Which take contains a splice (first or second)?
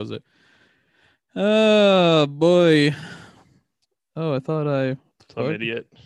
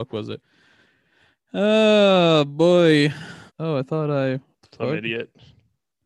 second